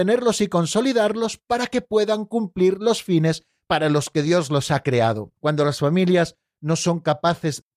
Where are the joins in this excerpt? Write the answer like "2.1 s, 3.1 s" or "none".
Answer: 5.4 s